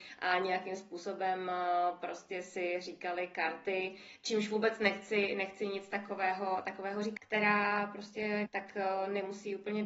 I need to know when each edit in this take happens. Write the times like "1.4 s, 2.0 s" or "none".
7.2 s, 8.5 s